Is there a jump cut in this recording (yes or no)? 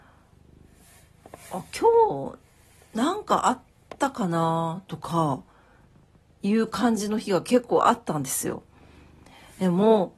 no